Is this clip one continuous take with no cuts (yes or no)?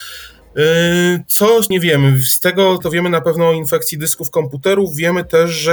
no